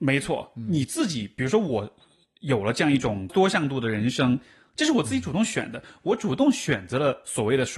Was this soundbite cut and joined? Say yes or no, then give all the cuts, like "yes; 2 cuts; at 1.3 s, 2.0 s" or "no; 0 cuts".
yes; 1 cut; at 3.3 s